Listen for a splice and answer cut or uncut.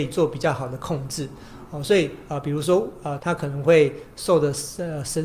cut